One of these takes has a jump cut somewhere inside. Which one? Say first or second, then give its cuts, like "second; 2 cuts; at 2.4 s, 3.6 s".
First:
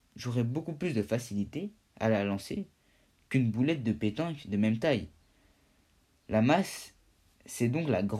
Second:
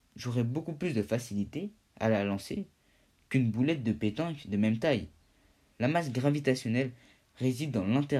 second; 1 cut; at 5.7 s